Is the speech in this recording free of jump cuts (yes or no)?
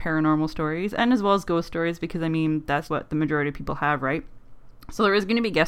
no